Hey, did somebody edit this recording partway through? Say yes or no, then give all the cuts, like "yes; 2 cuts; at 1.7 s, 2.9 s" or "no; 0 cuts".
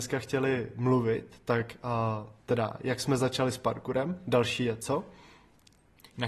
yes; 1 cut; at 2.5 s